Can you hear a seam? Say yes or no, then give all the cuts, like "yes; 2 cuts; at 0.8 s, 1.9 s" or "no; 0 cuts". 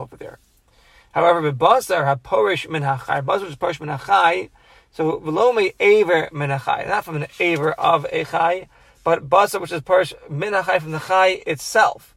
no; 0 cuts